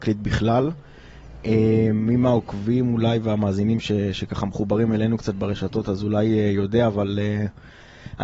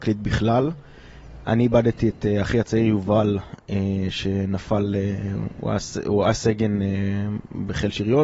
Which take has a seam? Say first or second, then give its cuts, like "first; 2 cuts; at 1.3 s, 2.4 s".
second; 1 cut; at 1.4 s